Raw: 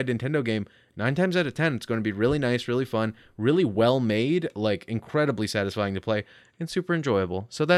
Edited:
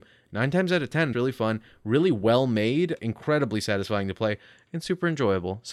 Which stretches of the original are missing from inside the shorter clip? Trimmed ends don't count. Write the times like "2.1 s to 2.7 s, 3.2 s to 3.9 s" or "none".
1.8 s to 2.7 s, 4.5 s to 4.9 s